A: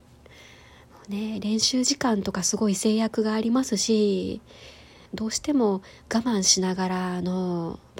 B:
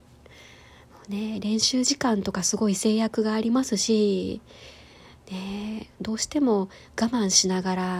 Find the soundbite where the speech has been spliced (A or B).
A